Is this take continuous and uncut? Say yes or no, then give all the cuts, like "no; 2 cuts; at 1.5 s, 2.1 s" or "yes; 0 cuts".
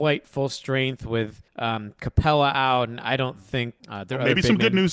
no; 2 cuts; at 1.5 s, 3.8 s